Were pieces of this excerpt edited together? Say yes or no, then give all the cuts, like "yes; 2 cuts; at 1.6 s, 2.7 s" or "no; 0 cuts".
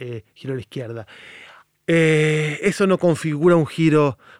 yes; 1 cut; at 1.7 s